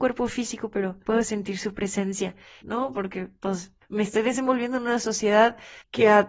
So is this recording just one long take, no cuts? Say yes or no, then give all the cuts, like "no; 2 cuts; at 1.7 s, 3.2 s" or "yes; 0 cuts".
no; 1 cut; at 2.6 s